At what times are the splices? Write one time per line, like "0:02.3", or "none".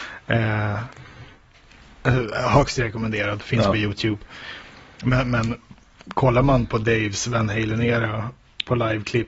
0:06.7